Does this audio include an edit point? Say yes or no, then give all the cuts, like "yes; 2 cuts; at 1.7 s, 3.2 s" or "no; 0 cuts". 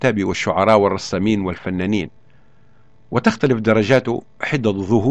no; 0 cuts